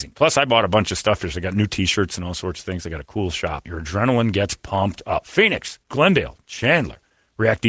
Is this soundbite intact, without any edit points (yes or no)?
no